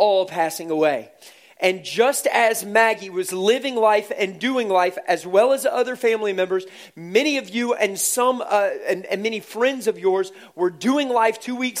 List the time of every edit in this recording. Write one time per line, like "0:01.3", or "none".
none